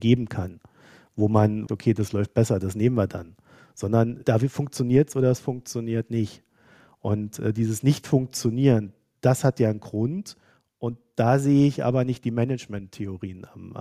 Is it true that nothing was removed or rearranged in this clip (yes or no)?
no